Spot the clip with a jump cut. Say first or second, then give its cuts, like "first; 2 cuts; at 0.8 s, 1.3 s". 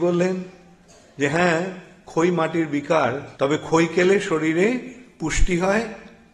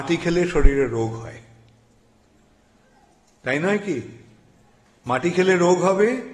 first; 1 cut; at 3.3 s